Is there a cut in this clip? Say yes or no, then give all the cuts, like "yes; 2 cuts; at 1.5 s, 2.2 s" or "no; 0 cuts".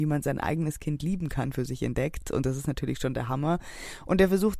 no; 0 cuts